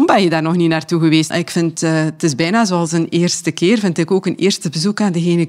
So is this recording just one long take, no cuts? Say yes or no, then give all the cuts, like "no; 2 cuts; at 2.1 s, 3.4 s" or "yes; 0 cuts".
no; 1 cut; at 1.3 s